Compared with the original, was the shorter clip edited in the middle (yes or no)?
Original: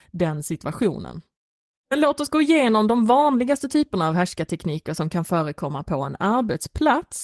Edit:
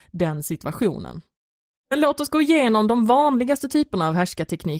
no